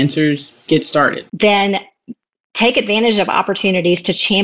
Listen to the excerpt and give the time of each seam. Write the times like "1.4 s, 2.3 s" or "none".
1.3 s